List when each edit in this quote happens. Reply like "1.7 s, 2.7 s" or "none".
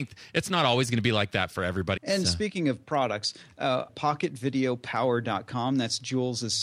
2.0 s, 3.9 s